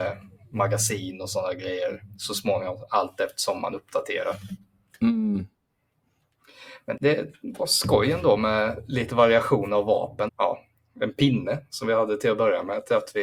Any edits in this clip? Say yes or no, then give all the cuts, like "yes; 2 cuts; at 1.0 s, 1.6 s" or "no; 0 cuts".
yes; 2 cuts; at 7.0 s, 10.3 s